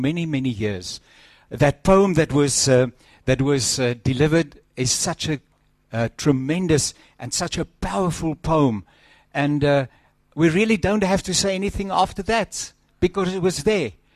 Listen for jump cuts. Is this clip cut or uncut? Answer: cut